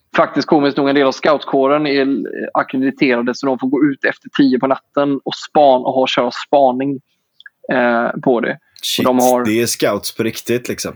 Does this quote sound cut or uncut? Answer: uncut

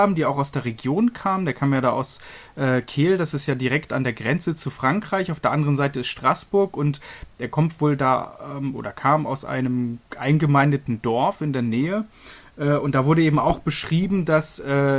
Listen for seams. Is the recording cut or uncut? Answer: uncut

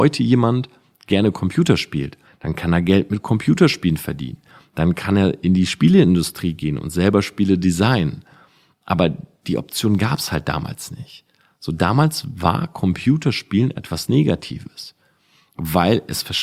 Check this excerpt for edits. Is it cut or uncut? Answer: cut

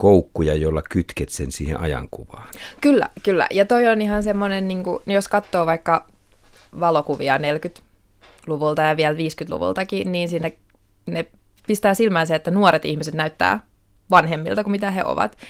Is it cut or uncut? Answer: uncut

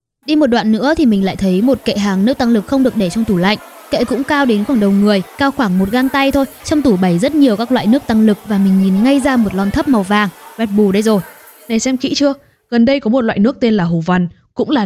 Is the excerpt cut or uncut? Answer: cut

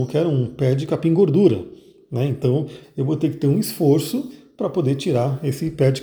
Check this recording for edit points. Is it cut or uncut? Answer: cut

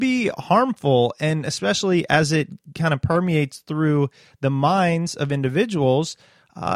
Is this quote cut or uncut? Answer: uncut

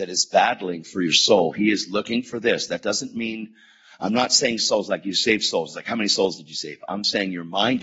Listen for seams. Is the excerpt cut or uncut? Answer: uncut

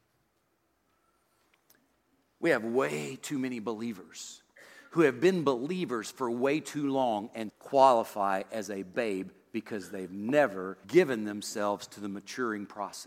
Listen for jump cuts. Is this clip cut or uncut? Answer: cut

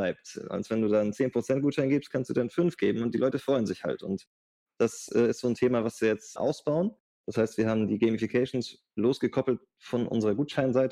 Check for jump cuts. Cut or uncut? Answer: uncut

